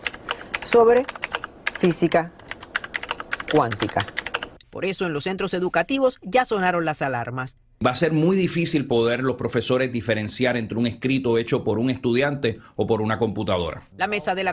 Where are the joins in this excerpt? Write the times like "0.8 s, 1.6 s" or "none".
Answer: 4.6 s

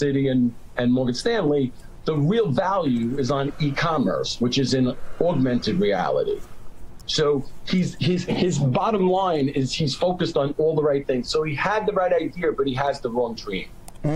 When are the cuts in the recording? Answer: none

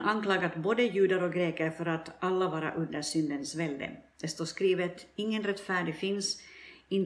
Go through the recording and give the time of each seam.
none

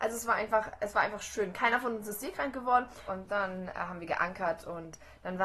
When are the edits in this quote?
3.1 s

